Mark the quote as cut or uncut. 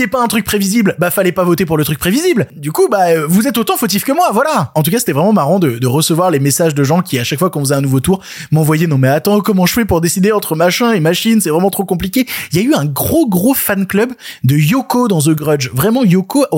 uncut